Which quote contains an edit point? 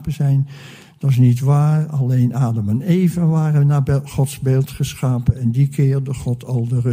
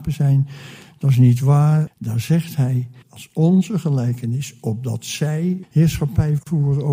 second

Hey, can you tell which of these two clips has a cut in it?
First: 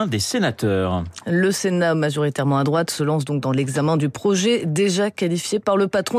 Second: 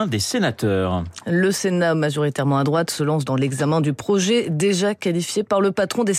second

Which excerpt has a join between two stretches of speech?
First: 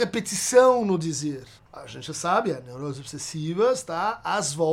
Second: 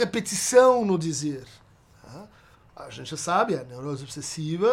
first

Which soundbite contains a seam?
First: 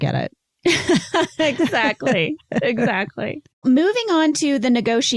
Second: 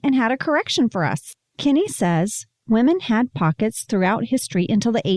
first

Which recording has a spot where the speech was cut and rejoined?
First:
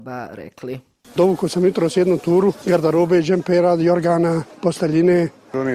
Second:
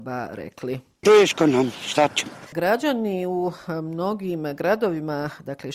second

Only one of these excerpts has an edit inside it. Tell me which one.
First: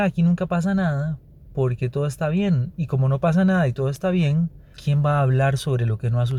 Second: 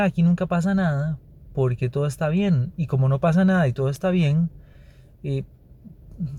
first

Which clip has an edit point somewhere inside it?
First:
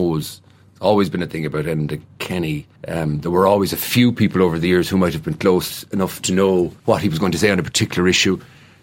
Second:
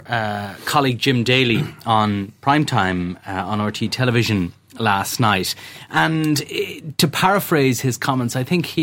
first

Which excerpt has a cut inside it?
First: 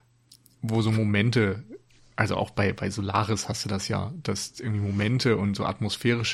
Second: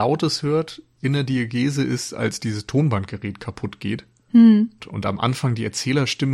second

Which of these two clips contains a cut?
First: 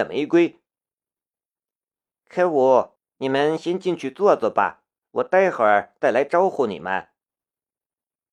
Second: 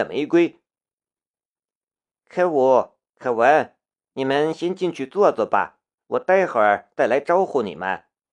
first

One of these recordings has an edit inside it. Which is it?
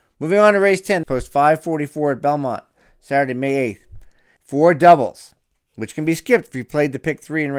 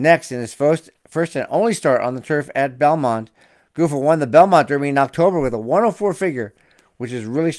first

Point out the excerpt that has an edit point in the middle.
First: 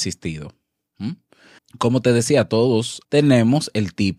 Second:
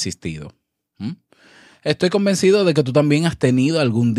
first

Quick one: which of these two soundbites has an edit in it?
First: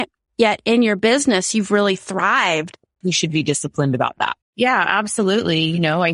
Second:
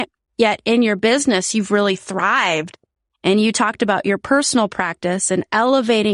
first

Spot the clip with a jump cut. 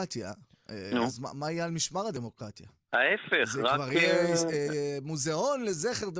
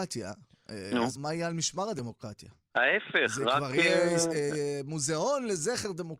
second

